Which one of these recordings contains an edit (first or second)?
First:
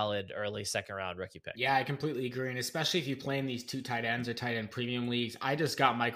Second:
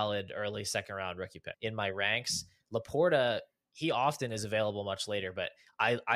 second